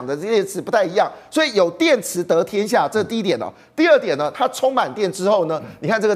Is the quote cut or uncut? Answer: uncut